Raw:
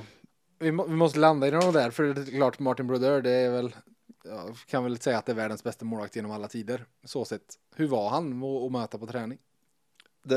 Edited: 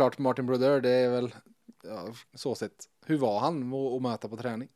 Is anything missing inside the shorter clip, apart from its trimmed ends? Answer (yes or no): yes